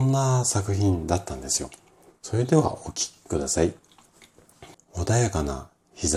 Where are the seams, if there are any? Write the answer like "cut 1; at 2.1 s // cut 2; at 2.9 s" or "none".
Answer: cut 1; at 2.1 s // cut 2; at 4.7 s